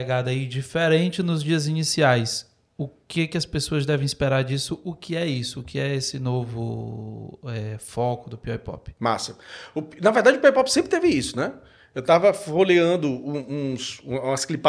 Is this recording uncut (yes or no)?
yes